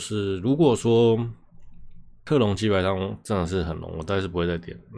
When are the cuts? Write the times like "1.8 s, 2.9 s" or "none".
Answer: none